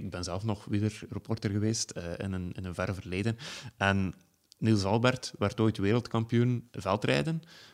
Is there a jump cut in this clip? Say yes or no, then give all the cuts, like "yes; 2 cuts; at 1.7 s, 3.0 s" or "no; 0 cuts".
no; 0 cuts